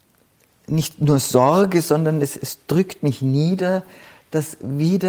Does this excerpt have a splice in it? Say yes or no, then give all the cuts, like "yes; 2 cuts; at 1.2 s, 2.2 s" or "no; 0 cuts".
no; 0 cuts